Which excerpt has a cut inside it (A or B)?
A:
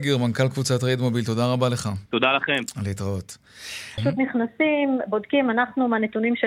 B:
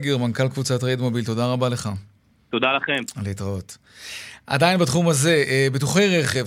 A